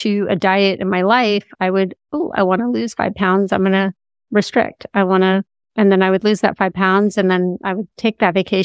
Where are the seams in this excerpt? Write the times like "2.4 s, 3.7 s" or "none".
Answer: 5.6 s